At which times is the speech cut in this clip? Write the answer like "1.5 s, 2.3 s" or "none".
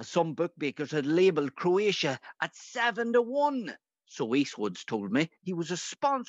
5.4 s